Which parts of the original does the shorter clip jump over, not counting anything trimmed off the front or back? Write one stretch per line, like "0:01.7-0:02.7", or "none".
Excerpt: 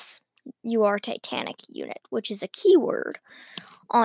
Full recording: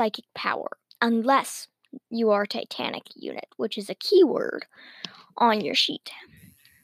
none